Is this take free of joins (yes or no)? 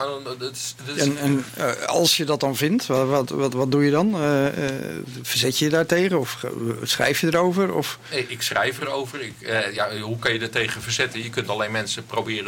yes